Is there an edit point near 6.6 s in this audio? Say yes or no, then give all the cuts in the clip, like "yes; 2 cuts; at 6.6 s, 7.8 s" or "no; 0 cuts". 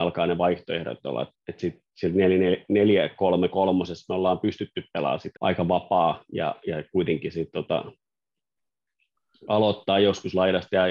no; 2 cuts; at 1.3 s, 5.4 s